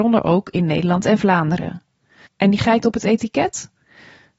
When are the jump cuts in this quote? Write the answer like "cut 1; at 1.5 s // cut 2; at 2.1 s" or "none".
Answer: cut 1; at 2.3 s